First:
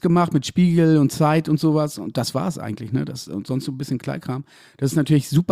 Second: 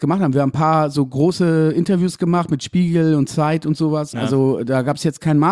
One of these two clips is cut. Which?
second; 1 cut; at 4.1 s

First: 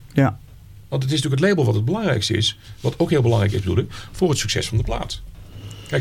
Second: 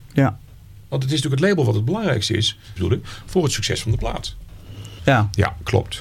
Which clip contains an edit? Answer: second; 2 cuts; at 2.8 s, 5.0 s

